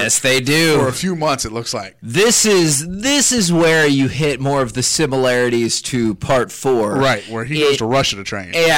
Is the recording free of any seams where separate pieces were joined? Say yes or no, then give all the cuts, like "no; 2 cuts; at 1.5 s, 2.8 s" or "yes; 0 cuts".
yes; 0 cuts